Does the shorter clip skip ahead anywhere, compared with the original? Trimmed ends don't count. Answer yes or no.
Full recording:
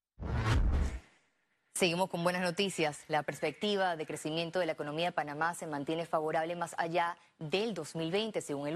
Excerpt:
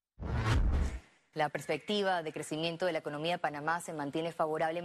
yes